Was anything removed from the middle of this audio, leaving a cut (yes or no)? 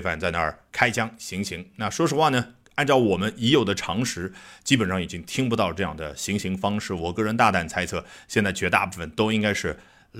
no